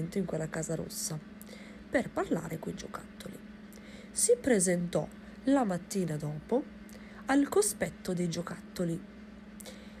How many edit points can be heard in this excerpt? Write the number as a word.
zero